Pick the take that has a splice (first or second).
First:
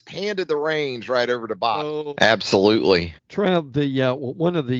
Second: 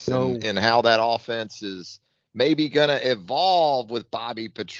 first